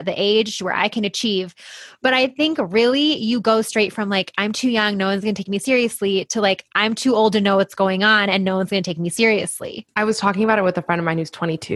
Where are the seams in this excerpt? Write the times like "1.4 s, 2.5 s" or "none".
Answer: none